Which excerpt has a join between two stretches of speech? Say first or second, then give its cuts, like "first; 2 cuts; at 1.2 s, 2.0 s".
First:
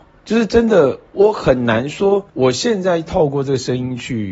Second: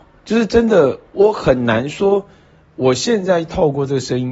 first; 1 cut; at 2.3 s